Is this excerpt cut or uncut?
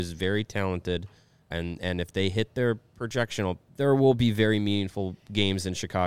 cut